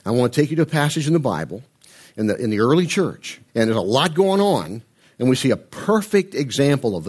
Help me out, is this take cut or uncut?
cut